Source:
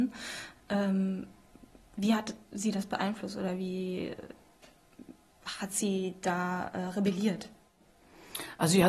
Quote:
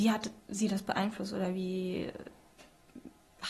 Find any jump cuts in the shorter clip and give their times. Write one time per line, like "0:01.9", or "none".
none